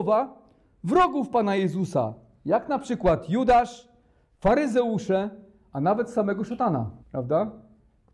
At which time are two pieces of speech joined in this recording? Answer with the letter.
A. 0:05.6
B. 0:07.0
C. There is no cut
B